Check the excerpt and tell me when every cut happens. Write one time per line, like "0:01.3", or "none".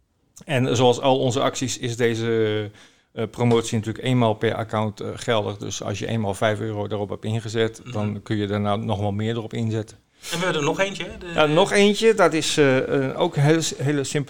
0:09.9